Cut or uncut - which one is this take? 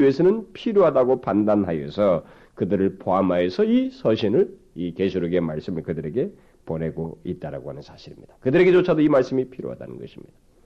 uncut